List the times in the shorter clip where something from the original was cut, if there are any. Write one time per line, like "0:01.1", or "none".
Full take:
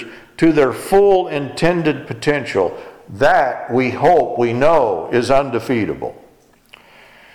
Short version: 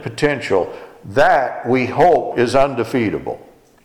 0:02.3